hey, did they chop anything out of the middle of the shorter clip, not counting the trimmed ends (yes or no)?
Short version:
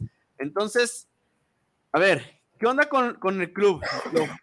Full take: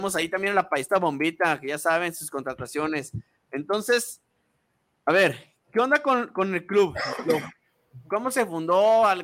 no